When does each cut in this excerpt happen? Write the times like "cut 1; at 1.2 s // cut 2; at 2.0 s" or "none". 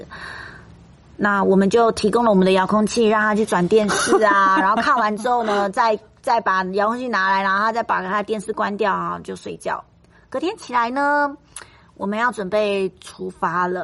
none